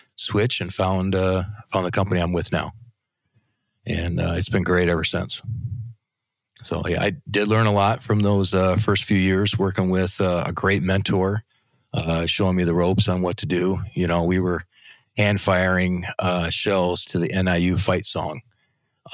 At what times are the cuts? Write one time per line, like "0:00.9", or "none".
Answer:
none